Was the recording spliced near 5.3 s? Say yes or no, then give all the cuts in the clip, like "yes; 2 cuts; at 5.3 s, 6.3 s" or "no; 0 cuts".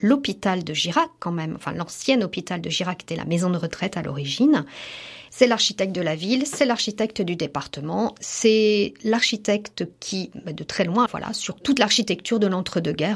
yes; 2 cuts; at 5.3 s, 11.1 s